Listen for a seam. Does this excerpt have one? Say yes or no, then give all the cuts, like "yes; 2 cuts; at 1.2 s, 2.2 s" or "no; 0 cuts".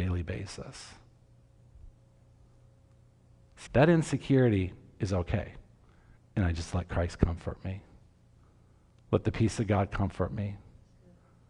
yes; 2 cuts; at 3.7 s, 6.2 s